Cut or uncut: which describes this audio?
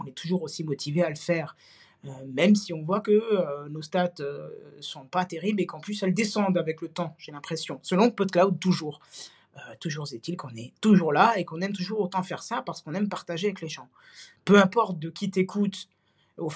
cut